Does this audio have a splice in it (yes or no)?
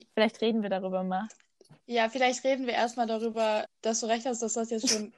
yes